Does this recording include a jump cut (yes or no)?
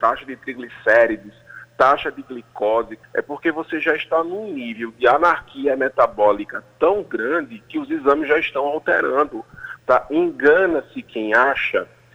yes